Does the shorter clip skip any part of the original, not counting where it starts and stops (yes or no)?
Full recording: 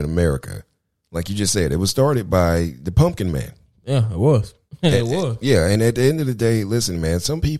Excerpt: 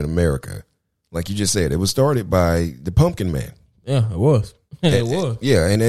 no